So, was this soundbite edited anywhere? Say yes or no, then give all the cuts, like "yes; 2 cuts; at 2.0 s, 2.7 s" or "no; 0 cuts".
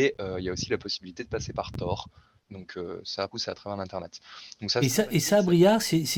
yes; 1 cut; at 3.3 s